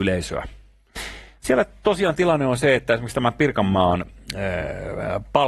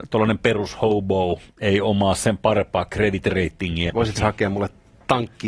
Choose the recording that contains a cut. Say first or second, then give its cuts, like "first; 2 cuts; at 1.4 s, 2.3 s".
second; 1 cut; at 3.9 s